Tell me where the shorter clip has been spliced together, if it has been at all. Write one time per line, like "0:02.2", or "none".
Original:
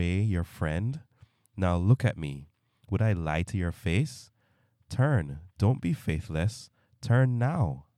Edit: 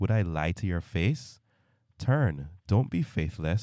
none